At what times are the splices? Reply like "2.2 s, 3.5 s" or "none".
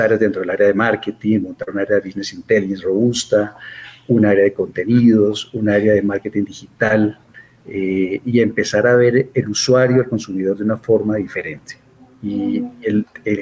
none